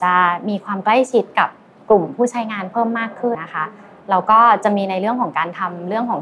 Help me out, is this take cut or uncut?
cut